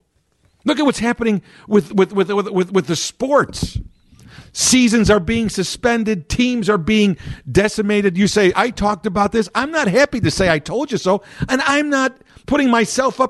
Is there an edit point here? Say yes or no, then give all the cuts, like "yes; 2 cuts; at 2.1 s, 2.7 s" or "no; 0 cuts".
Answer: yes; 1 cut; at 8.5 s